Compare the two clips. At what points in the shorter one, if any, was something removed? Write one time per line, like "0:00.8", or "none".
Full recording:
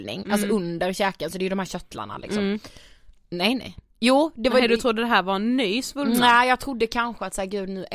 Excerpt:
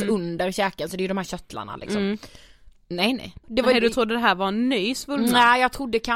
0:03.4

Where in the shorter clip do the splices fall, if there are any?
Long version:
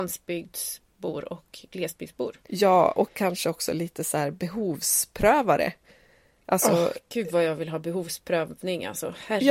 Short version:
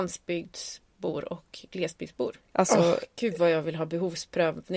0:02.4

